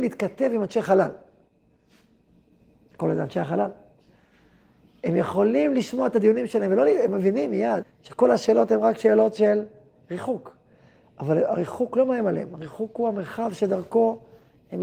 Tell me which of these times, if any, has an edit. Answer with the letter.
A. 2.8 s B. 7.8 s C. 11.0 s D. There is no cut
B